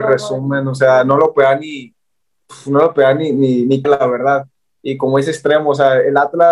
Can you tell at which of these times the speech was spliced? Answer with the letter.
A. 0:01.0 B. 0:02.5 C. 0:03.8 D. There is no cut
C